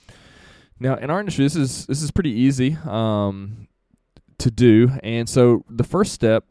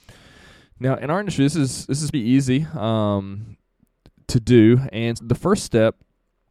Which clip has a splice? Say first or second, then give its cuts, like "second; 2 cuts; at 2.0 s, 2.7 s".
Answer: second; 2 cuts; at 2.1 s, 5.2 s